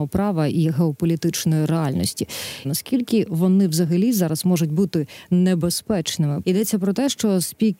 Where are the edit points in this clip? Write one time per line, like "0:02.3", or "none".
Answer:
0:02.6
0:06.4